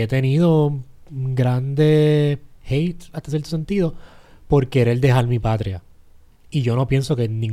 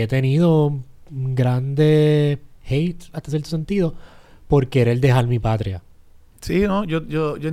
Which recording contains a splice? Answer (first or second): second